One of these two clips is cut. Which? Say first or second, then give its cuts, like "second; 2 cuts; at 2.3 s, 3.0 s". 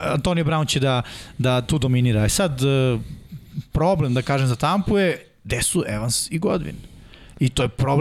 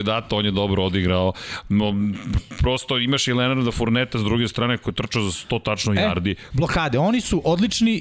second; 1 cut; at 6.5 s